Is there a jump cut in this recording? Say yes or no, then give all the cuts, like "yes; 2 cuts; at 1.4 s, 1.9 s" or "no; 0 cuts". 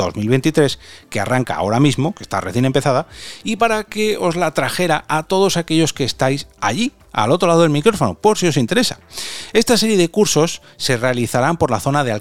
no; 0 cuts